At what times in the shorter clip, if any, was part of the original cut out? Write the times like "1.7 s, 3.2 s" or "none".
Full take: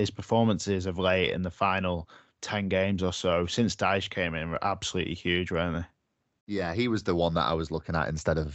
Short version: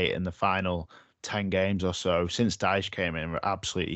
none